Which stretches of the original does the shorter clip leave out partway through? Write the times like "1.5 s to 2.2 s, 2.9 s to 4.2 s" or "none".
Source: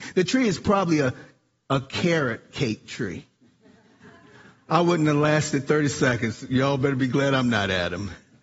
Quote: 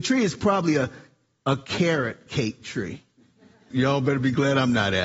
3.9 s to 6.5 s